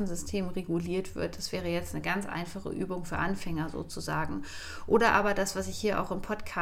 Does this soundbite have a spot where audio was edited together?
no; 0 cuts

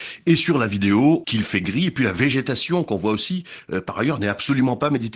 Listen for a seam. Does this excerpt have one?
yes; 1 cut; at 1.2 s

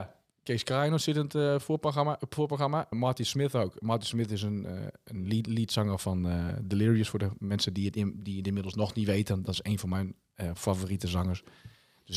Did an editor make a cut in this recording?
yes; 1 cut; at 2.9 s

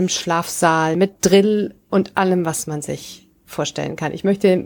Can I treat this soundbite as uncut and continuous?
yes; 0 cuts

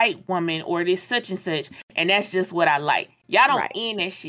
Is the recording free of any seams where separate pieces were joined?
yes; 0 cuts

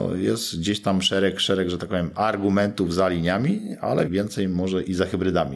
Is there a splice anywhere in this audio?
yes; 1 cut; at 4.1 s

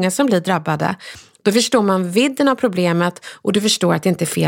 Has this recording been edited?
no; 0 cuts

